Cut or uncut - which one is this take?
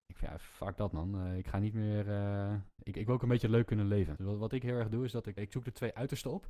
cut